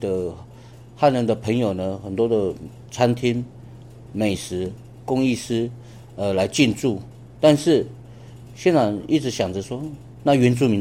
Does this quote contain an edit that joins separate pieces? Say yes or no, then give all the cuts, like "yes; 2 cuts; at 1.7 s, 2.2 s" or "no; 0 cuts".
no; 0 cuts